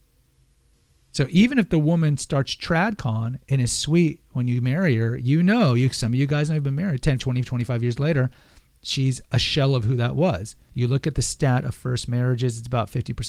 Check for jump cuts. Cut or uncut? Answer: cut